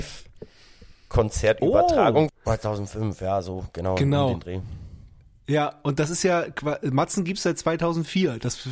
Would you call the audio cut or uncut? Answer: cut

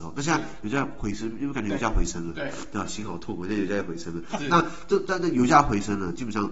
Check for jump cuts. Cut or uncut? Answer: cut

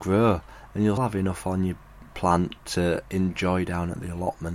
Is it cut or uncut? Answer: cut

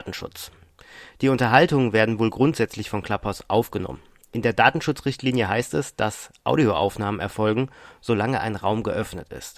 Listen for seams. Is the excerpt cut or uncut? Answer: uncut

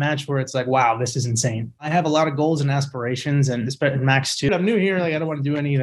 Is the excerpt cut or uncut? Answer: cut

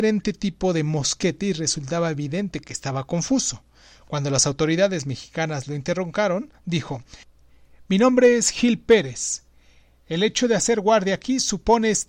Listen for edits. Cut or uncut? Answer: uncut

